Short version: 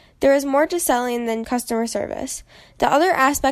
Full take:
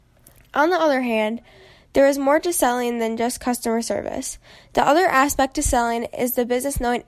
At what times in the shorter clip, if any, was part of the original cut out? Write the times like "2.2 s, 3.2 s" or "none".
1.4 s

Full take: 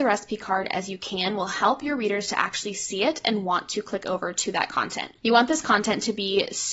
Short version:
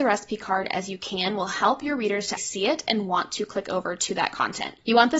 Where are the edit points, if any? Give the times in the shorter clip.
2.4 s

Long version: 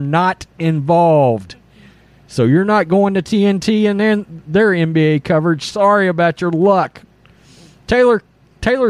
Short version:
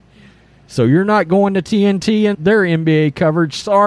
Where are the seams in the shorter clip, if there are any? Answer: 2.3 s

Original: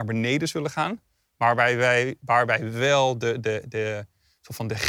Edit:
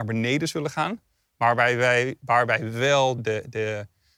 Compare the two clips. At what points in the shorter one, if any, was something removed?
3.2 s

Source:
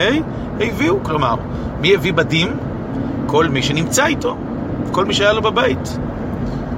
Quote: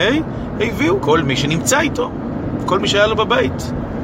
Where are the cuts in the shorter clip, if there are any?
1.0 s

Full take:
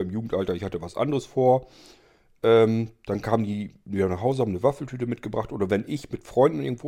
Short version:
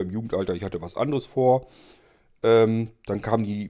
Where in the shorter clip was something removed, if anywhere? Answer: none

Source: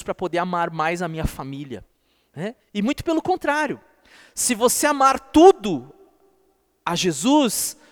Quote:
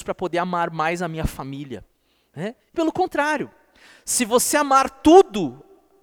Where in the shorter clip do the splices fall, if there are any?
2.7 s

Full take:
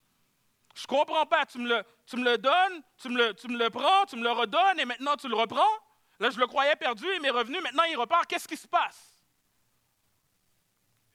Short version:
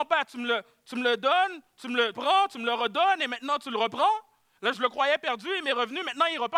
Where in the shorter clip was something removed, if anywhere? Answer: 2.1 s

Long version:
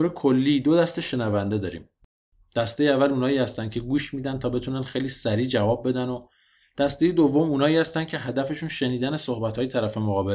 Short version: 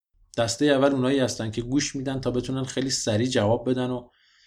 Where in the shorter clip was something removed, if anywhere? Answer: none

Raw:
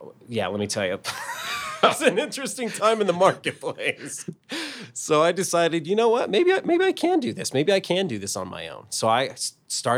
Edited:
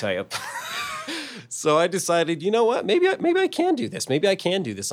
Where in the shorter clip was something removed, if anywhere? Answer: 1.1 s

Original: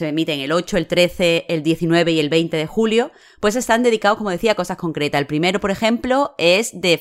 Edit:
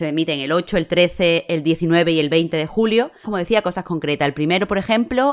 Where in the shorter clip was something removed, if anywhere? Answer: 3.2 s

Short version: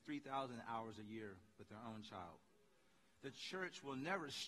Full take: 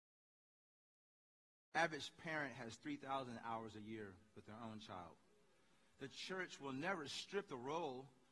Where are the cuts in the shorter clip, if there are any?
none

